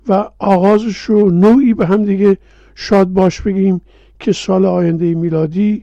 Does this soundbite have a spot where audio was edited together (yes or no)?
no